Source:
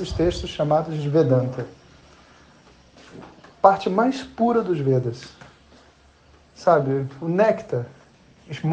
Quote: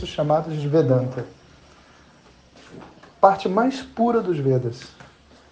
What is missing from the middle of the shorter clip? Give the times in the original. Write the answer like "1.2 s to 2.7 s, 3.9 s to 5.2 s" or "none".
none